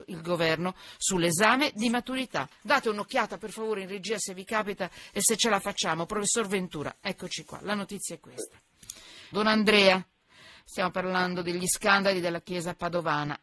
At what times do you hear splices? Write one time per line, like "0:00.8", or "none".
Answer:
0:02.5
0:09.3